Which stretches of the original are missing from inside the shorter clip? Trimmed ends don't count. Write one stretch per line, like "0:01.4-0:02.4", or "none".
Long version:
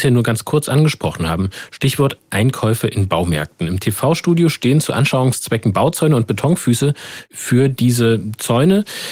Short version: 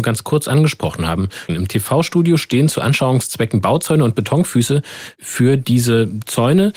0:01.7-0:03.6